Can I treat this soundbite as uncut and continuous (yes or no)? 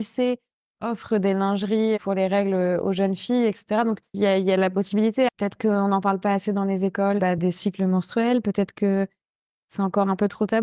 no